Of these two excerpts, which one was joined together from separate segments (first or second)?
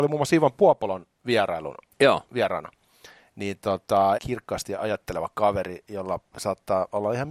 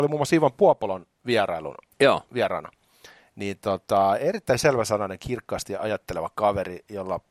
first